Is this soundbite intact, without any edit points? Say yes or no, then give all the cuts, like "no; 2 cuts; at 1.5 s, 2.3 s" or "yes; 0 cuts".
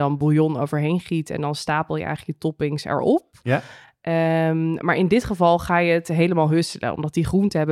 yes; 0 cuts